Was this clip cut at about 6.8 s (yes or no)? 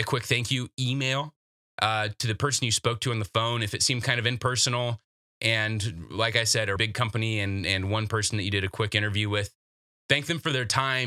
yes